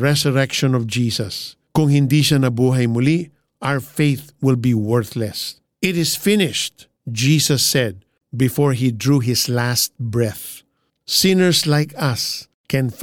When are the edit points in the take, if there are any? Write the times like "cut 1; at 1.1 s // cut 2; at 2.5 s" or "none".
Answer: cut 1; at 5.7 s // cut 2; at 11.0 s